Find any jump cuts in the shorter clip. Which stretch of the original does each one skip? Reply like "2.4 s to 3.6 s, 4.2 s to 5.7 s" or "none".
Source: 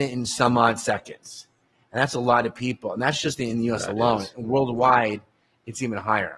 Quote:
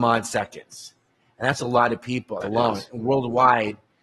2.9 s to 3.9 s